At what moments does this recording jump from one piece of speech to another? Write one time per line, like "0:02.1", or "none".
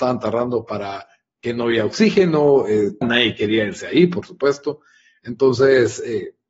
0:03.0